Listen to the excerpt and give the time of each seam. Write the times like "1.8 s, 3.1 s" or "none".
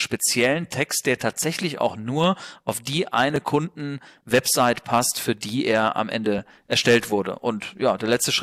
none